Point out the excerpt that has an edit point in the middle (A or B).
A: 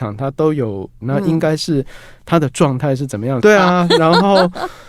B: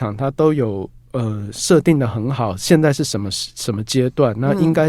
A